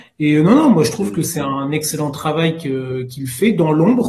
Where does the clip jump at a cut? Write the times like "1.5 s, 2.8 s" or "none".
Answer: none

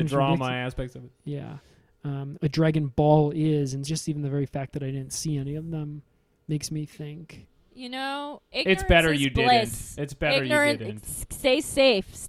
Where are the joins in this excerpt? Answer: 2.3 s, 3.8 s

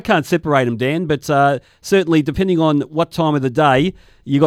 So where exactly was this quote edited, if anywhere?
none

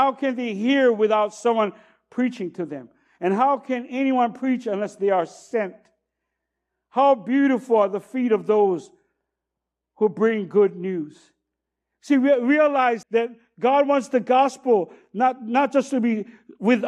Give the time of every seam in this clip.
13.0 s

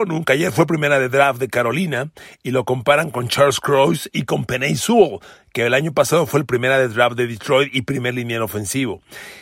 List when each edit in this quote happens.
none

